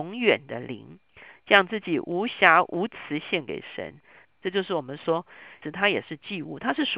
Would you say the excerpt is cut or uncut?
cut